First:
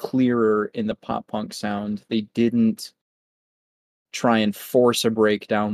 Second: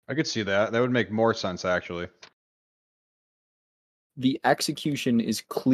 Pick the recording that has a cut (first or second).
second